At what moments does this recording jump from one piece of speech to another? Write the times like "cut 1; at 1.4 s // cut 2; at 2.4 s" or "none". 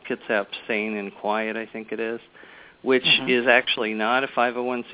none